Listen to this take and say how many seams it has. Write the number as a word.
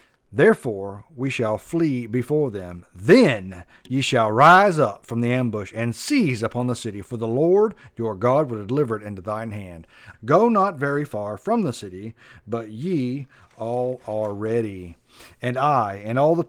one